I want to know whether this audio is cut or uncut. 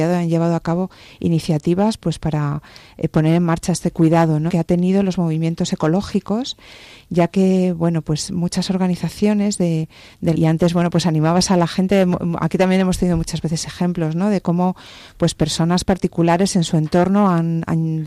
cut